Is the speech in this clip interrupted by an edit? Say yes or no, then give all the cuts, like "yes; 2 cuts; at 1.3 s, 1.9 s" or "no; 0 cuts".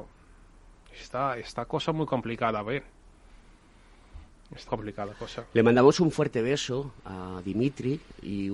yes; 1 cut; at 4.7 s